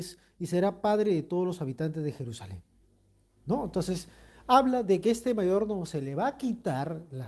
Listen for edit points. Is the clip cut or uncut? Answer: uncut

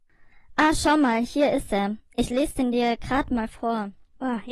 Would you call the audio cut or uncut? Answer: uncut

